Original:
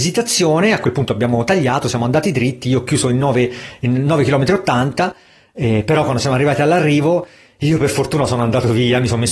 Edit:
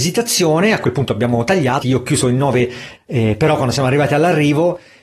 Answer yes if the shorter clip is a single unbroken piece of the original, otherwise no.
no